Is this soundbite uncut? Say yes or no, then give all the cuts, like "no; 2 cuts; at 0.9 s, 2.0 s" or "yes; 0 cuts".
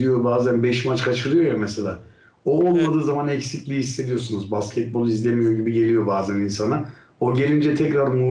yes; 0 cuts